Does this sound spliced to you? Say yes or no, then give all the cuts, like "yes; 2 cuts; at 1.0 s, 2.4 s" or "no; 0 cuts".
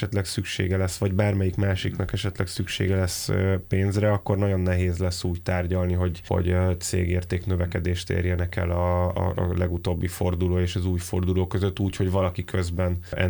no; 0 cuts